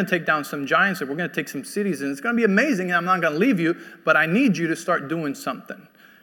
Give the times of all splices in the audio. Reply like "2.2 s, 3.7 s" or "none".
none